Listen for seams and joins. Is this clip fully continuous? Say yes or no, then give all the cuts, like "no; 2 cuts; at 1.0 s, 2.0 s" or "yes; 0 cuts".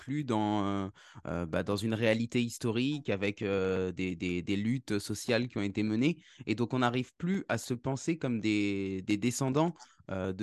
yes; 0 cuts